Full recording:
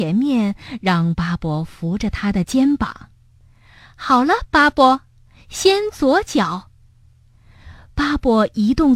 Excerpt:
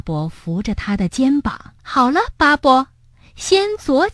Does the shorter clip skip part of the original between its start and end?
yes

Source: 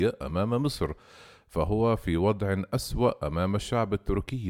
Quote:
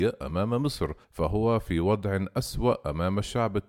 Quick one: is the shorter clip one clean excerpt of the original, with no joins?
no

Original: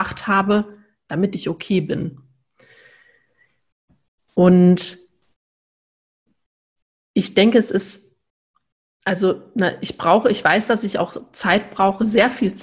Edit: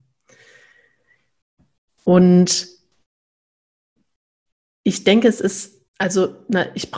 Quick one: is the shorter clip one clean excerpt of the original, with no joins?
no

